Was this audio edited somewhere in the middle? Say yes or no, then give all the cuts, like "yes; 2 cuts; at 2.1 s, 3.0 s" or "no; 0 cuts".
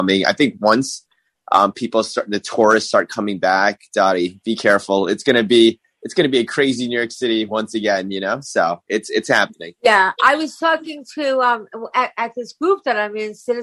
no; 0 cuts